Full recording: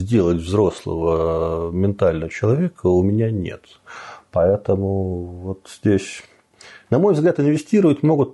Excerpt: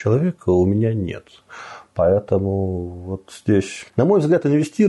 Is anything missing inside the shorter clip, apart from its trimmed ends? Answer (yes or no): yes